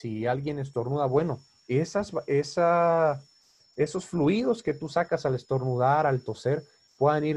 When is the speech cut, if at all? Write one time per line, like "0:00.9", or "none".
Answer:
none